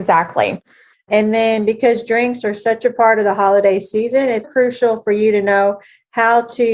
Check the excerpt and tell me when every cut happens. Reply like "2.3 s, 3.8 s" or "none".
0.9 s, 4.4 s